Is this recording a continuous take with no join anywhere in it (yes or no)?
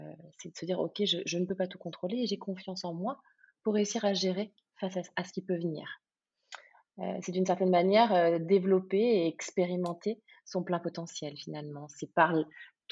yes